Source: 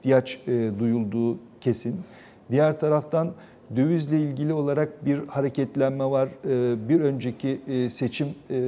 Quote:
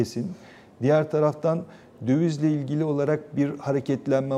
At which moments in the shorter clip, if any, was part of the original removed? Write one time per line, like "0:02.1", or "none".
none

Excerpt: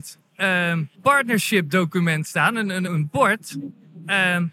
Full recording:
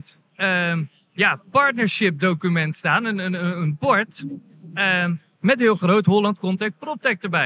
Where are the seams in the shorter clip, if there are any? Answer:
0:00.9
0:02.9

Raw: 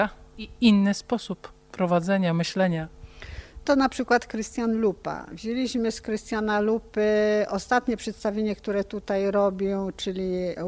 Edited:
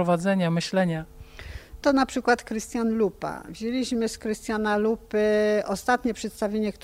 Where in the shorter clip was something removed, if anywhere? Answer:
none

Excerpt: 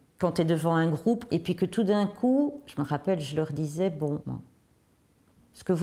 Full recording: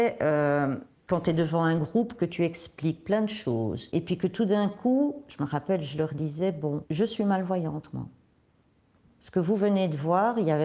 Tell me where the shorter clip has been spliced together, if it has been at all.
0:01.3
0:04.2

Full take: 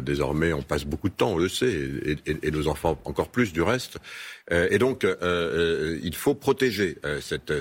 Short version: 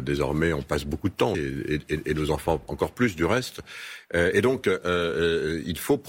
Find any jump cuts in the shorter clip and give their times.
0:01.3

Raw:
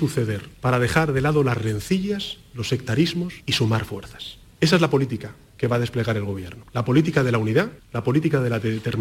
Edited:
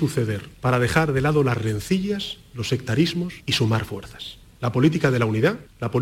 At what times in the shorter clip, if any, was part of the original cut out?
0:04.6

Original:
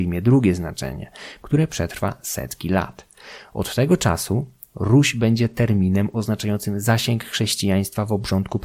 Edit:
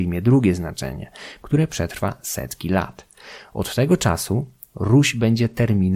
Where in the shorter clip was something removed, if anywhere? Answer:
none

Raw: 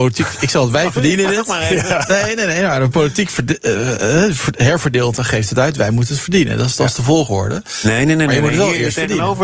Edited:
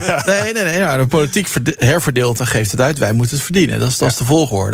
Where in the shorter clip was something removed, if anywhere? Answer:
0:01.8

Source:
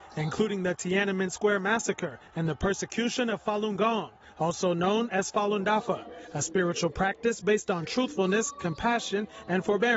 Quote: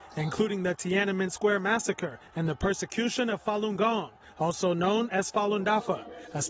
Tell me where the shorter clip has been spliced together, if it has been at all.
none

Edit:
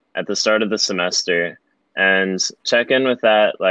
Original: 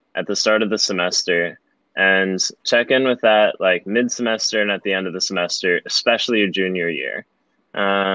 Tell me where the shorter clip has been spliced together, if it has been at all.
none

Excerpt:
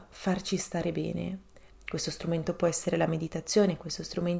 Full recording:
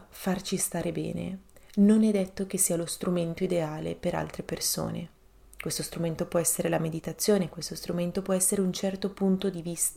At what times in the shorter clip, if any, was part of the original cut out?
0:01.7

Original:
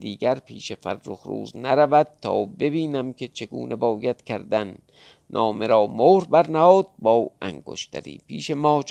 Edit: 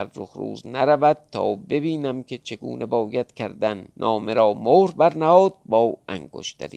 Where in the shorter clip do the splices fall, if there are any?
0:03.9

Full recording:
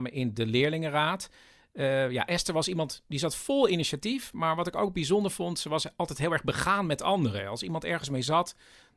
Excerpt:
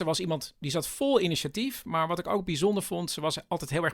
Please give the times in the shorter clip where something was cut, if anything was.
none

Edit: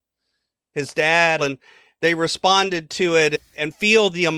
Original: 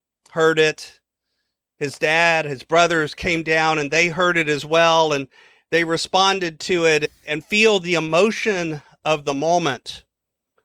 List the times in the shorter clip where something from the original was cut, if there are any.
0:01.4

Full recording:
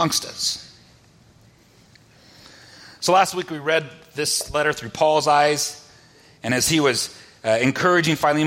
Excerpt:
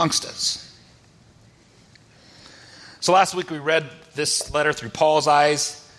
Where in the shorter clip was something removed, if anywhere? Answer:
none

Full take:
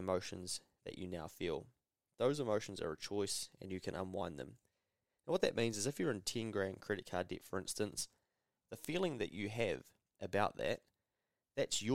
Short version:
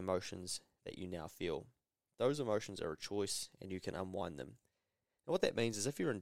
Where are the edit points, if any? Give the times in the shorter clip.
none

